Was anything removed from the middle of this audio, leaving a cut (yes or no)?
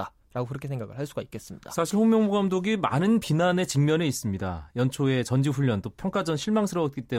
no